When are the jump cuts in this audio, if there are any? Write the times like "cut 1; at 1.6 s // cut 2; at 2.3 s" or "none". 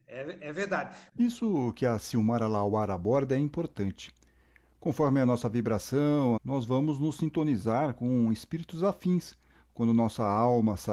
cut 1; at 6.4 s